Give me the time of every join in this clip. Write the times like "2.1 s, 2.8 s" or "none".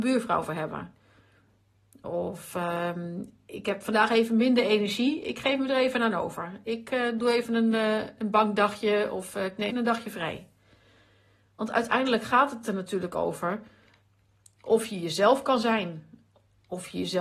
9.7 s